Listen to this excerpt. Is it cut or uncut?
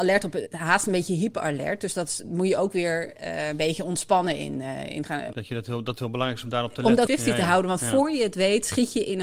cut